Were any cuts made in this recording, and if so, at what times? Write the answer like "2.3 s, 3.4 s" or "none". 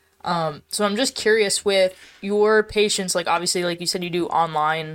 none